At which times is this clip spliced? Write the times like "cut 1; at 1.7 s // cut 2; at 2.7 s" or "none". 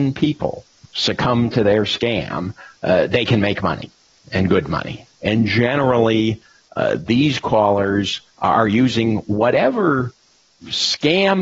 cut 1; at 5.1 s